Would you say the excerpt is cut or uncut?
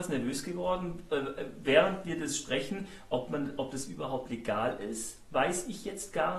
uncut